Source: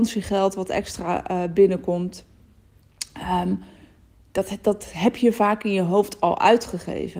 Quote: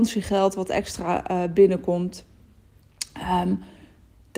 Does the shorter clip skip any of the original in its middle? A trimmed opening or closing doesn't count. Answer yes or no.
no